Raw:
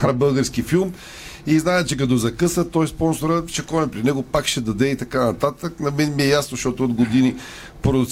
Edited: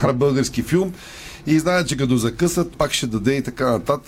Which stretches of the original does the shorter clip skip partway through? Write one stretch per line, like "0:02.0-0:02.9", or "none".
0:02.7-0:04.2